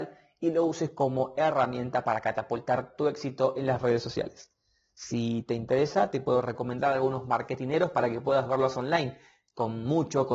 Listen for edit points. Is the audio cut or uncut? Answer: uncut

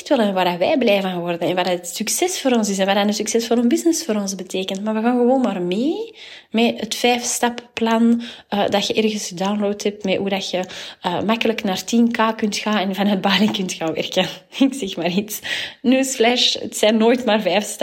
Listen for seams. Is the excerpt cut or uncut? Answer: uncut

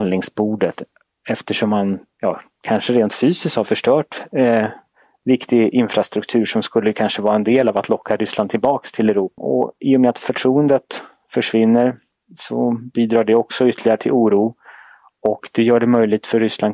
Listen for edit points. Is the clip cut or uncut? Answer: cut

